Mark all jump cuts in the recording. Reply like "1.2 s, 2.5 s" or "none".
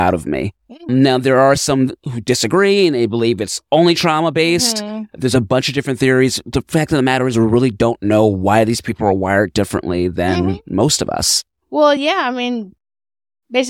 none